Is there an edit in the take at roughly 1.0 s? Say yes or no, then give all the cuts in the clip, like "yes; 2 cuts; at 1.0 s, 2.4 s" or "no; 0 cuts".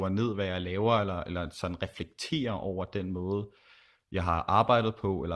no; 0 cuts